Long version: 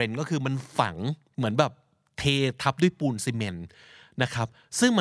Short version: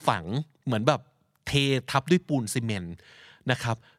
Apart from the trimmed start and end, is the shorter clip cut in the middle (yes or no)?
no